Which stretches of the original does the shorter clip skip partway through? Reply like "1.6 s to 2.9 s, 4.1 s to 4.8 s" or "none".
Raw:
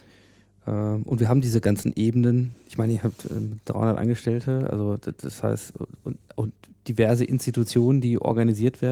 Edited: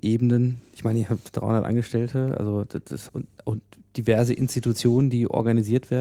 3.2 s to 3.6 s, 5.4 s to 6.0 s